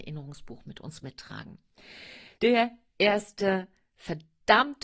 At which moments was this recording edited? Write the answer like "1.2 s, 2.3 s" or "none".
2.4 s